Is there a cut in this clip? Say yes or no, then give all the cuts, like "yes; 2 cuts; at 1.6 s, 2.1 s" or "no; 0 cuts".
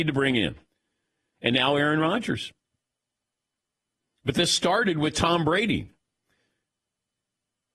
no; 0 cuts